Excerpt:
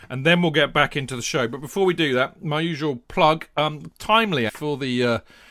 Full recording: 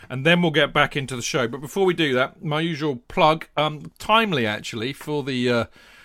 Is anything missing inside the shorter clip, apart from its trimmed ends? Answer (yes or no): yes